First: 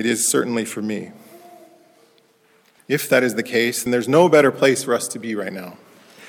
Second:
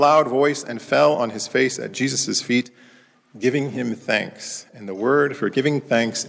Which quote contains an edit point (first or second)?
first